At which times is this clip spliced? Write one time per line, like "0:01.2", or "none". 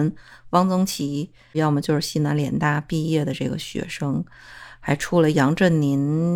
0:01.5